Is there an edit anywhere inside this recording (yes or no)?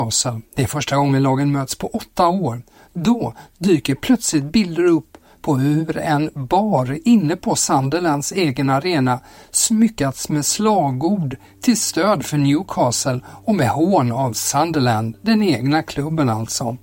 no